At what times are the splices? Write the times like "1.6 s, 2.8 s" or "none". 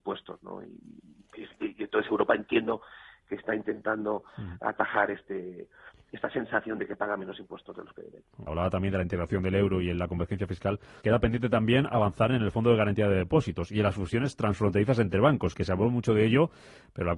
8.5 s, 11.0 s